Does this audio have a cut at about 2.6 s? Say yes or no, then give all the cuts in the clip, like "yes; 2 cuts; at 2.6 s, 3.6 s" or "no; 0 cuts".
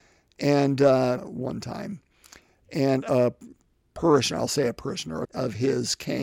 no; 2 cuts; at 1.2 s, 5.2 s